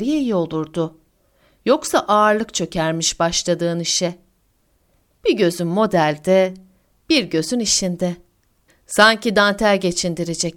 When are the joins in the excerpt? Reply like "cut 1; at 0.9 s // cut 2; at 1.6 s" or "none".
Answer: cut 1; at 8.7 s